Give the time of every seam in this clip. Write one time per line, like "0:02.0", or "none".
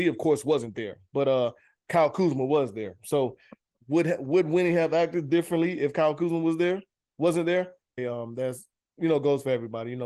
0:08.0